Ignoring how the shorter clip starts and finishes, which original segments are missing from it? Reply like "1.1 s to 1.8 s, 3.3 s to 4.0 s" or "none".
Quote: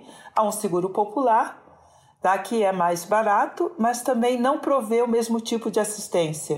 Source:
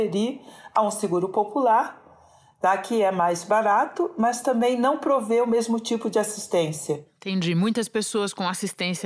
none